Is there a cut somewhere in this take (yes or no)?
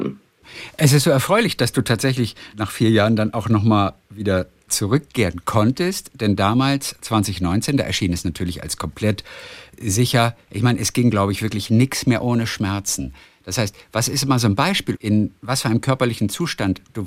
yes